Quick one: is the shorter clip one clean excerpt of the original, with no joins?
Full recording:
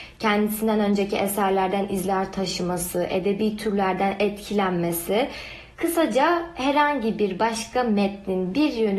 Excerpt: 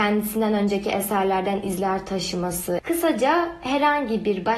no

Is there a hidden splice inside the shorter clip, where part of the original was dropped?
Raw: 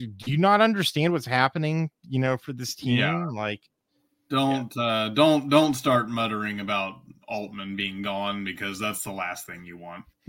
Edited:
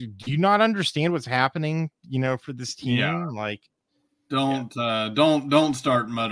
no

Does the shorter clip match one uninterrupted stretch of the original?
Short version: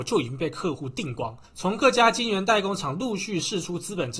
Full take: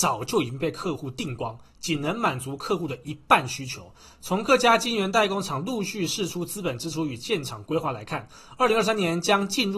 no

